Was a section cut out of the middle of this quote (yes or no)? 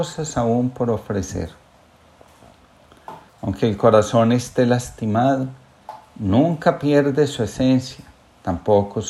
yes